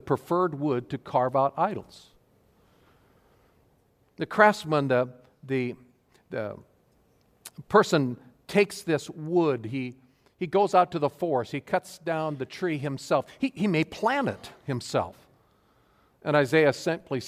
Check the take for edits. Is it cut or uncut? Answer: uncut